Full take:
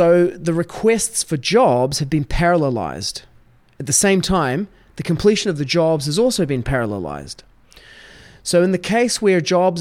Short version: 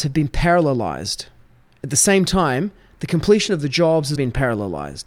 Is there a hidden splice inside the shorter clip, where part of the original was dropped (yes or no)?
yes